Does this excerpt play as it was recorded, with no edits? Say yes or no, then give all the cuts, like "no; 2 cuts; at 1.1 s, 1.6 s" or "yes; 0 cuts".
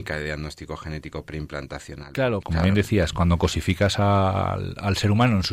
no; 1 cut; at 2.4 s